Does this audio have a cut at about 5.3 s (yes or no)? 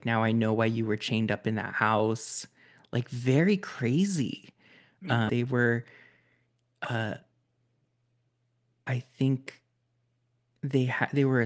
yes